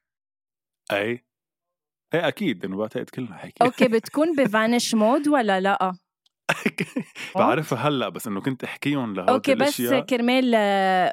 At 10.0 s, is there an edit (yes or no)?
no